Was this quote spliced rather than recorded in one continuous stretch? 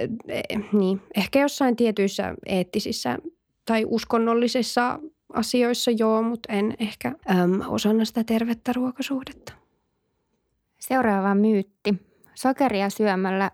yes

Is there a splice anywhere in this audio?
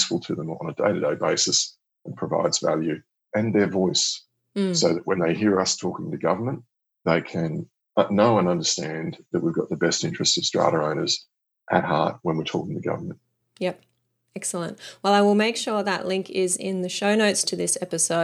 no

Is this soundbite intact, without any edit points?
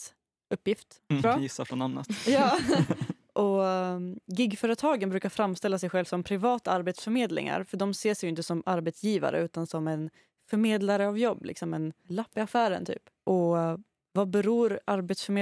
no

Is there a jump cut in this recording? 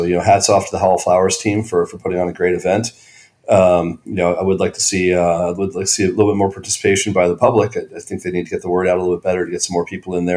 no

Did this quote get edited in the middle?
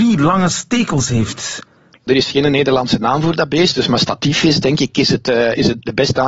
no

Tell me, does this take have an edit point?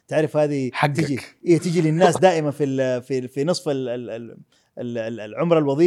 no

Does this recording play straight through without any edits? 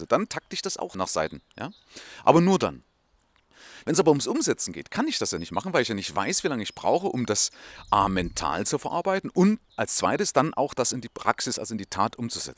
yes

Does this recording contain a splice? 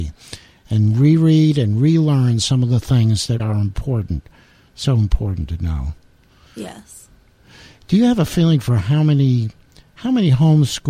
yes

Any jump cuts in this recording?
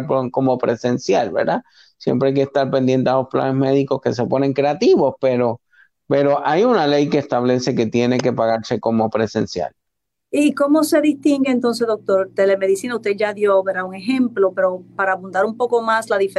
no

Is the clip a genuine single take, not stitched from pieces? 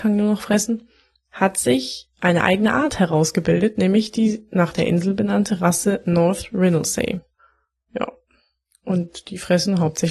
yes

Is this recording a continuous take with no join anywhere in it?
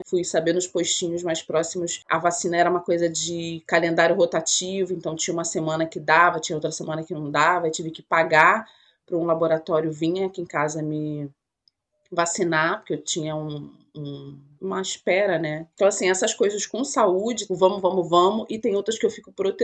no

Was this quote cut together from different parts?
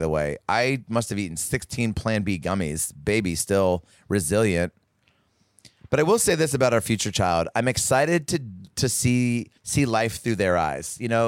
yes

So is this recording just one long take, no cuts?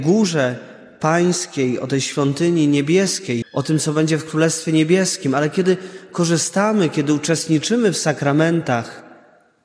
no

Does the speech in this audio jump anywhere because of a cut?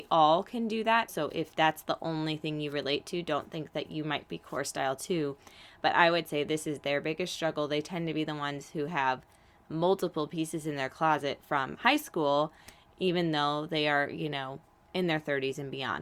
yes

